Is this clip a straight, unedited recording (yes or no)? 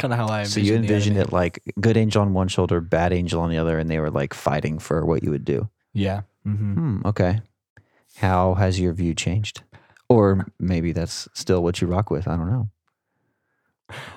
yes